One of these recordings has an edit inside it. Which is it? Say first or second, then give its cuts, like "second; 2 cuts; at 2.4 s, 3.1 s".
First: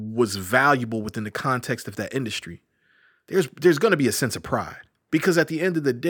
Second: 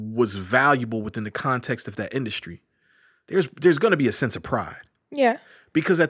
first; 1 cut; at 5.1 s